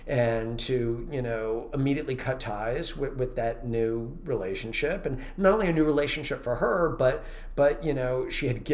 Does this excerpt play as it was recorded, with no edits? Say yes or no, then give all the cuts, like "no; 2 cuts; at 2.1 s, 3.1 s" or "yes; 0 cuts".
yes; 0 cuts